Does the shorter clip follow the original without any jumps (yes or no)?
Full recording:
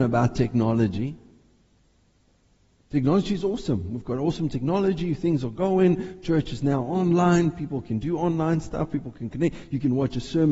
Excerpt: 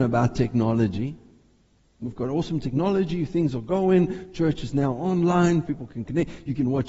no